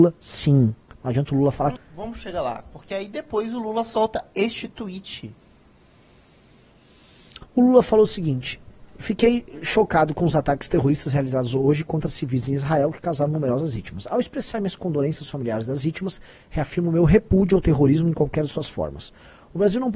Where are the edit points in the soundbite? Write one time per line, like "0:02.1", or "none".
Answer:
0:01.8